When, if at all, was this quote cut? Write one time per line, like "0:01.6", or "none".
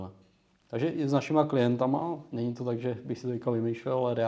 0:02.3